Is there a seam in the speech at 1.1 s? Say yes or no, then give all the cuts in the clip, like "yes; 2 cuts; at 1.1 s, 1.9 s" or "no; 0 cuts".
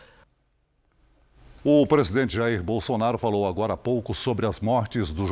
no; 0 cuts